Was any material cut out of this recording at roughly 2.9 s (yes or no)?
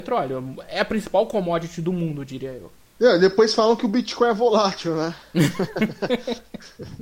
no